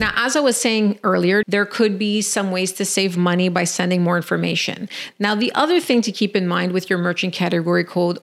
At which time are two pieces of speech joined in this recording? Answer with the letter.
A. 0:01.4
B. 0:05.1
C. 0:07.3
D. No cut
A